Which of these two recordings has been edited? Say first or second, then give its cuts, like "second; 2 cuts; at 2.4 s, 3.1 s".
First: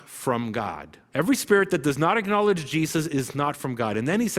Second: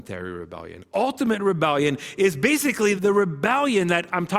second; 1 cut; at 3.0 s